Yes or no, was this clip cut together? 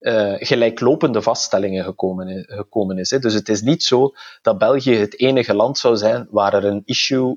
no